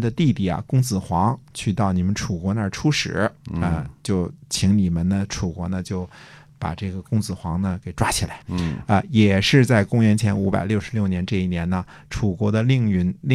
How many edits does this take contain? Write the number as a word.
one